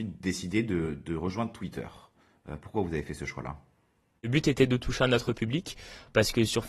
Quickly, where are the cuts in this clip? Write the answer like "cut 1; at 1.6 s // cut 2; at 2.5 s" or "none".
none